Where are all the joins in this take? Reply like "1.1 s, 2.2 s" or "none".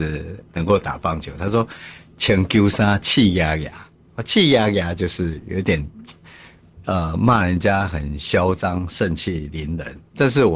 none

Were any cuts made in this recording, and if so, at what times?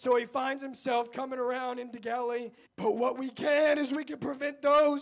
2.7 s

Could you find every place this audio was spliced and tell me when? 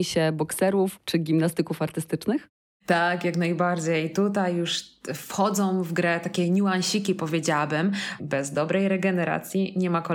1.0 s, 8.2 s

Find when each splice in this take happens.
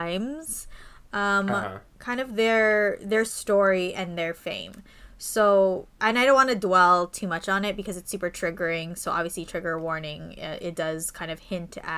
none

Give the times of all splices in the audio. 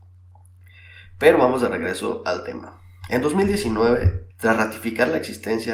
4.3 s

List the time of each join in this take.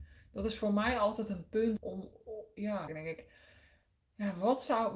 1.8 s, 2.9 s

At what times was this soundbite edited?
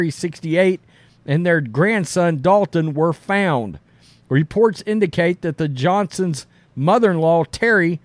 none

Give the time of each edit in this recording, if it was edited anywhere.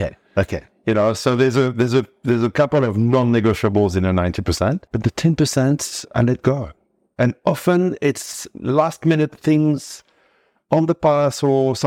4.9 s

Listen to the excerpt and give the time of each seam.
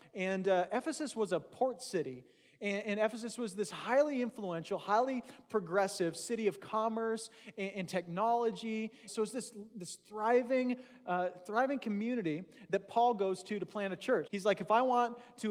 9.1 s, 14.3 s

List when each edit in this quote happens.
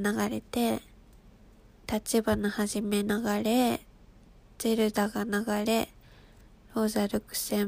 1.8 s

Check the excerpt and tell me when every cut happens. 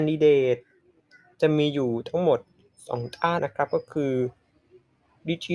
3.4 s

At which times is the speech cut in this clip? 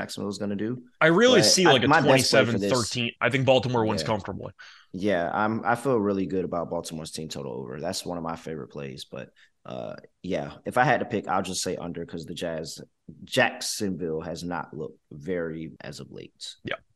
3.2 s, 15.8 s

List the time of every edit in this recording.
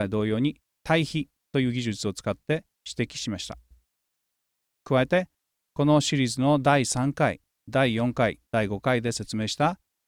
none

